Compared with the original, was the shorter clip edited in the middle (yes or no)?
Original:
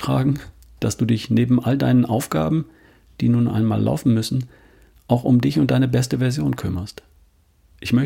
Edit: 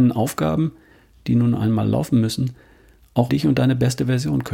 yes